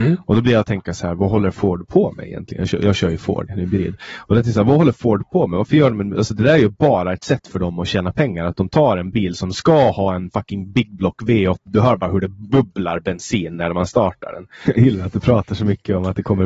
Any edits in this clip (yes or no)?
yes